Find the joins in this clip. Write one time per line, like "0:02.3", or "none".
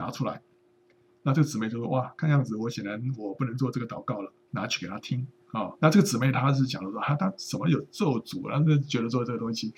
0:04.5
0:05.8